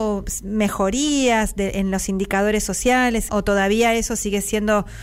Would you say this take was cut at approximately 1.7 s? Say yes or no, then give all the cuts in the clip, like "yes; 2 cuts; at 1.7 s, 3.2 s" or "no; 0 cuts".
no; 1 cut; at 3.3 s